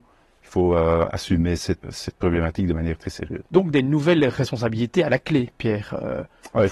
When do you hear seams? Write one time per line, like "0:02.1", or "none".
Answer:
0:01.8
0:03.5